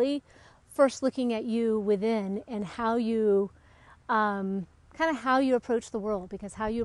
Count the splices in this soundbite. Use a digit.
0